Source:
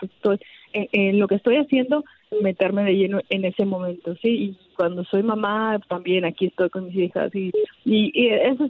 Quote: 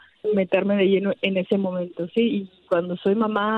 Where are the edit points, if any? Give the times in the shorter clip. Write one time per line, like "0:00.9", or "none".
none